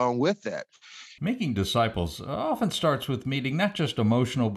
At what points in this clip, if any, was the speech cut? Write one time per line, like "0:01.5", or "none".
0:01.2